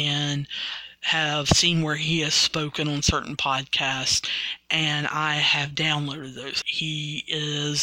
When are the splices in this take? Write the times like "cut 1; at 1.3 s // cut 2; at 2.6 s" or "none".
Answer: cut 1; at 6.6 s